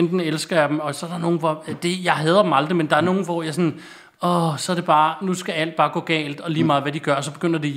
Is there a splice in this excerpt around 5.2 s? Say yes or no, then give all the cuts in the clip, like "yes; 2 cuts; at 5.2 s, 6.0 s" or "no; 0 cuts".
no; 0 cuts